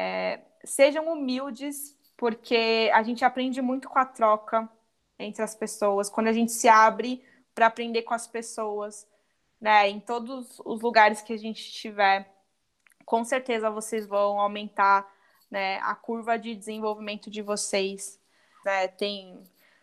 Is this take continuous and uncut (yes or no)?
no